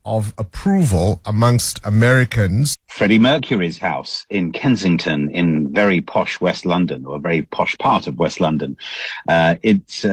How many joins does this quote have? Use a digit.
1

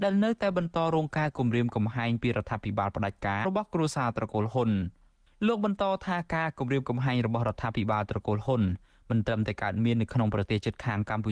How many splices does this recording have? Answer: 1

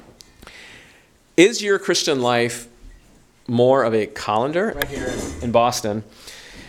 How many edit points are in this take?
1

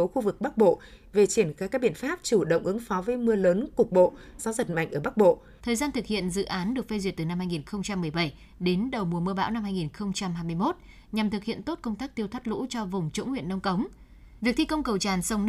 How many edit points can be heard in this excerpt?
3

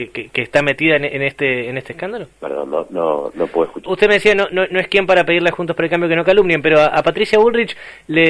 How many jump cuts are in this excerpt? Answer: 2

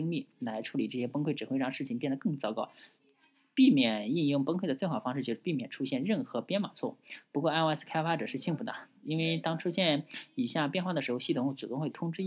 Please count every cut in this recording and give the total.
0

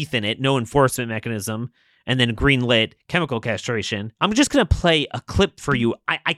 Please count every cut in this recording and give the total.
1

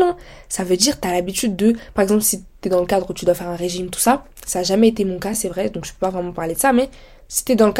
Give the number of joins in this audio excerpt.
0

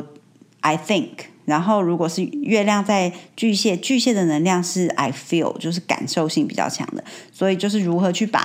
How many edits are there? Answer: 0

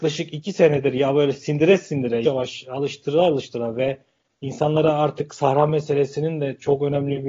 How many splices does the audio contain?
1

